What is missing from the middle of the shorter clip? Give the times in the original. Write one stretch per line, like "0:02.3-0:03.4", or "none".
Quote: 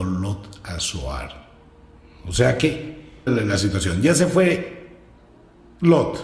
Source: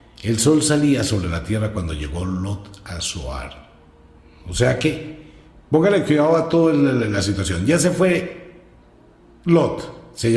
0:05.5-0:06.9

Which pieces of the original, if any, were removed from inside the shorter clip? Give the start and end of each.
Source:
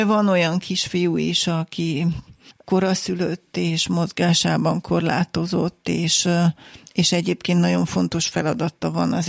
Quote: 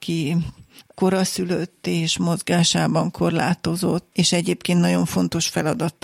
0:05.8-0:06.9

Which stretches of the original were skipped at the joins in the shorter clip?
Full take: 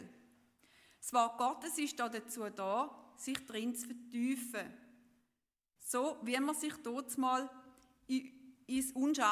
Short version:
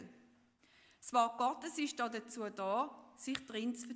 none

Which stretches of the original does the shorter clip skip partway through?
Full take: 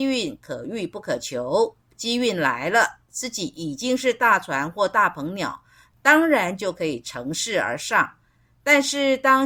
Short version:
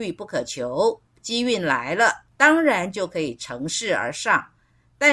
0:03.0-0:05.9

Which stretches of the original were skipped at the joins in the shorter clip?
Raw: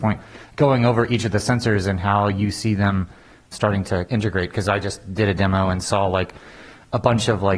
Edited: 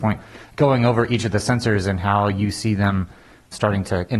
none

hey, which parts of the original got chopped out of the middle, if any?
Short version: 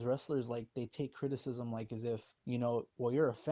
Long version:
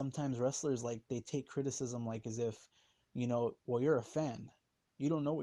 0:02.7-0:03.1

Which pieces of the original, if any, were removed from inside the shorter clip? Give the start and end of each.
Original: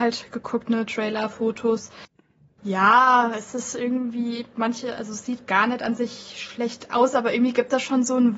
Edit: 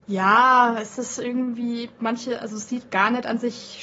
none

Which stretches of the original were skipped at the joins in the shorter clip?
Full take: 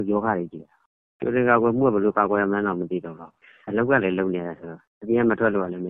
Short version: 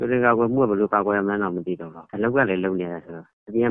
0:03.3-0:03.6

